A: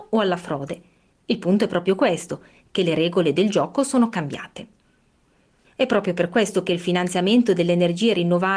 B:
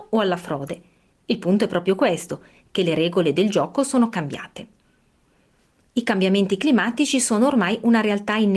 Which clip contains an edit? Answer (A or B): A